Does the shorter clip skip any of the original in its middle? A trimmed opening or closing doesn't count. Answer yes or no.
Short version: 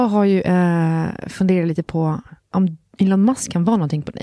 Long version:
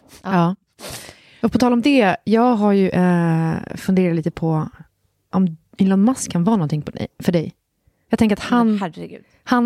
yes